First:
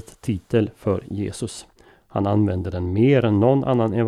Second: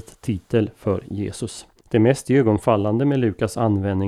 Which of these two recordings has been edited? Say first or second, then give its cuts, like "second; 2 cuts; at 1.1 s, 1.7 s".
second; 1 cut; at 1.8 s